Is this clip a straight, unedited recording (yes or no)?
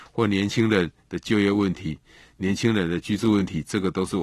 yes